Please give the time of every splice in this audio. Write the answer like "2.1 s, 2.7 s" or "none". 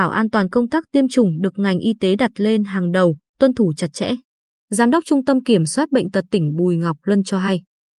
none